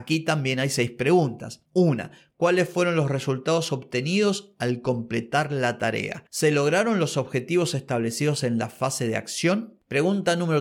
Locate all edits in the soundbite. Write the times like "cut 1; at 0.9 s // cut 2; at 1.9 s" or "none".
cut 1; at 6.3 s